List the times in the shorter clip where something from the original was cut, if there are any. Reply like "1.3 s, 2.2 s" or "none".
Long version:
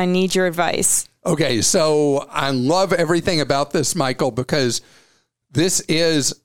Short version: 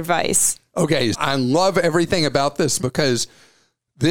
1.1 s, 2.8 s